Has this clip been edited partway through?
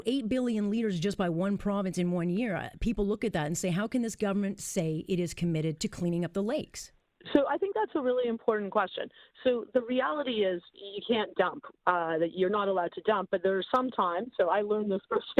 no; 0 cuts

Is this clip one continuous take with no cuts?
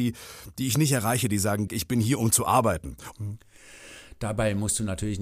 no; 2 cuts; at 1.7 s, 3.1 s

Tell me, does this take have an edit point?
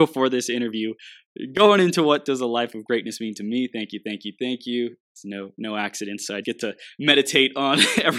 yes; 1 cut; at 6.4 s

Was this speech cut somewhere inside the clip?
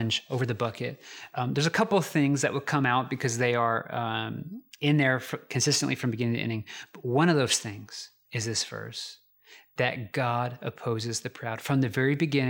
no; 0 cuts

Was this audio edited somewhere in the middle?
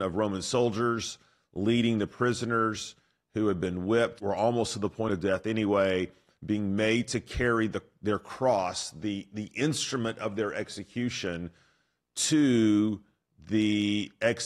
yes; 1 cut; at 4.2 s

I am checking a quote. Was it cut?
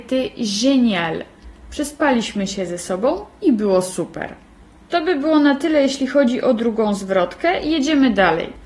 no; 0 cuts

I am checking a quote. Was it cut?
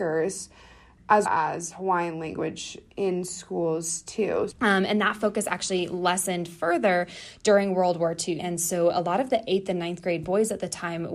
yes; 3 cuts; at 1.2 s, 4.5 s, 8.4 s

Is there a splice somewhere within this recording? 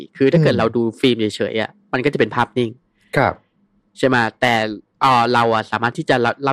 no; 0 cuts

